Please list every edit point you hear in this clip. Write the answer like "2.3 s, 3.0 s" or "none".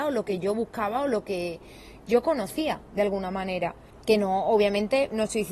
3.9 s